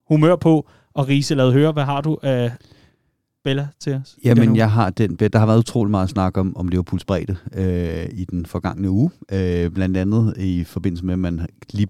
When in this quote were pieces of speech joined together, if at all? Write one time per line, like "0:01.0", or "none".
none